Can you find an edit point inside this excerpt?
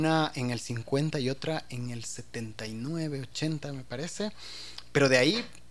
no; 0 cuts

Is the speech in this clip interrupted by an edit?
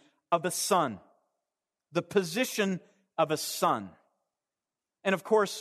no; 0 cuts

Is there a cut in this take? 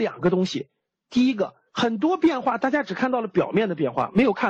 yes; 1 cut; at 1.7 s

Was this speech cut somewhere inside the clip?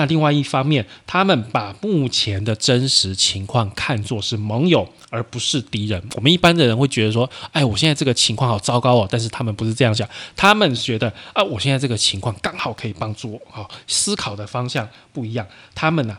no; 0 cuts

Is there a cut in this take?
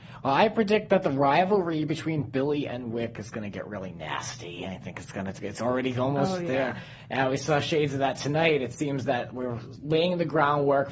no; 0 cuts

